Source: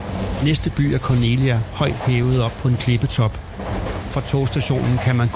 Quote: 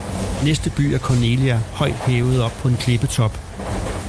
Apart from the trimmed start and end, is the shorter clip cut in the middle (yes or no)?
no